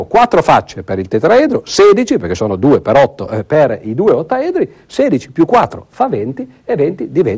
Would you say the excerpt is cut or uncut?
uncut